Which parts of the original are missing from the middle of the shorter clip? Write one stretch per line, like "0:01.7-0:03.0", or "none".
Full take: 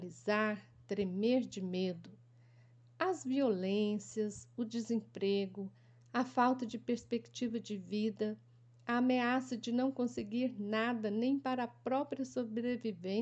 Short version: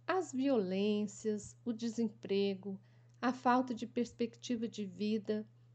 none